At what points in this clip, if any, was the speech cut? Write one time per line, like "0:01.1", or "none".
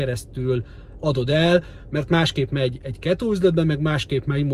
0:01.0